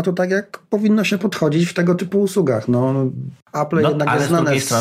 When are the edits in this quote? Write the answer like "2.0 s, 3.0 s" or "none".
none